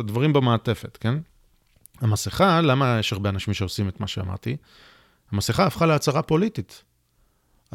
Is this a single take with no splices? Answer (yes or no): yes